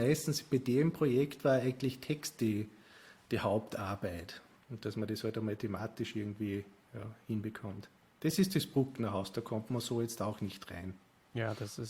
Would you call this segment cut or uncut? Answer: cut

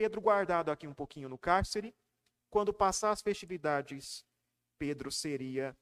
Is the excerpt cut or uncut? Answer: uncut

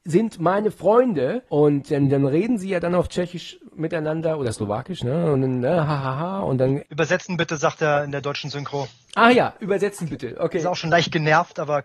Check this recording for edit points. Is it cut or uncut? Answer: cut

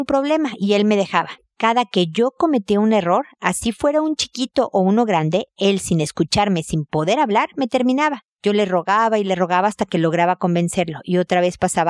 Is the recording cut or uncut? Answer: uncut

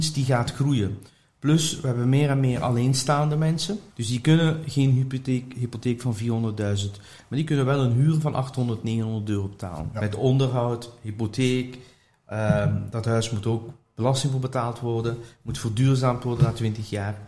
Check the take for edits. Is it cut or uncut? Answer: cut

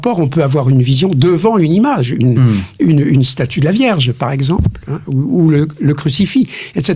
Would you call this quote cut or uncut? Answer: uncut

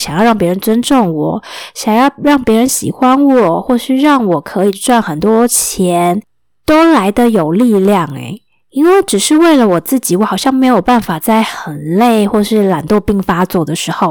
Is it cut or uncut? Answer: uncut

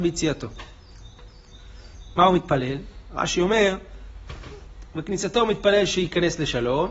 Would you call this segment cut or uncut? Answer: uncut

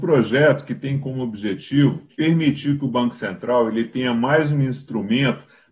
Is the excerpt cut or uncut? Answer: cut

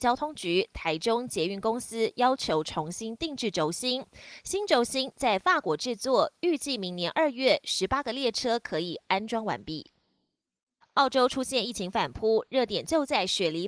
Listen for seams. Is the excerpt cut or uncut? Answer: cut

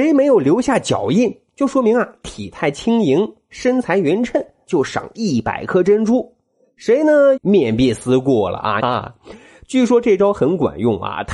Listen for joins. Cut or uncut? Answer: cut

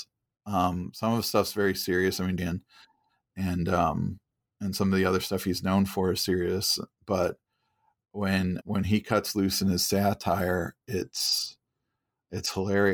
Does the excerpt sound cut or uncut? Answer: cut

